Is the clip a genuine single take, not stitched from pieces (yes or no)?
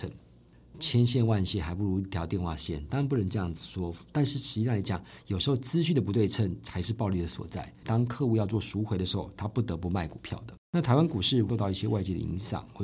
no